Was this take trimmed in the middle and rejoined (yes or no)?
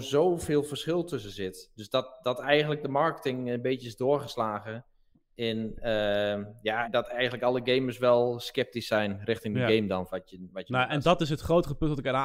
yes